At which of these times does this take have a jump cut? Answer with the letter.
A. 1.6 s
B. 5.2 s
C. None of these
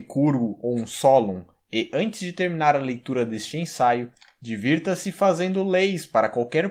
C